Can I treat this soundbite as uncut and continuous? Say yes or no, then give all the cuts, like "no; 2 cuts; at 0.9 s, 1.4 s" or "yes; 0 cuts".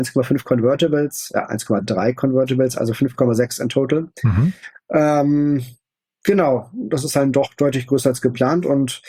yes; 0 cuts